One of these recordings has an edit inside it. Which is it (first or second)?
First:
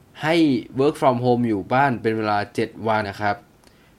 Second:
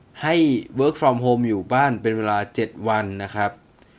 first